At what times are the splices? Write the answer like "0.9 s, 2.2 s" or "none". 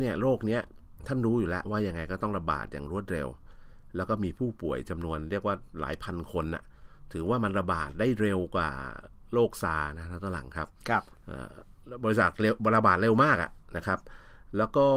1.6 s